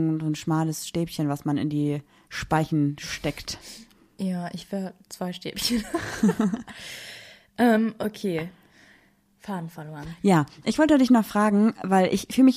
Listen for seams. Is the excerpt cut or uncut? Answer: uncut